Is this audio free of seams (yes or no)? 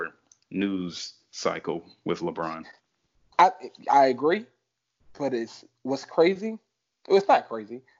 yes